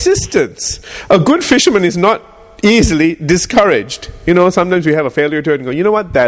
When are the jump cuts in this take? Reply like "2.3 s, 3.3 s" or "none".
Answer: none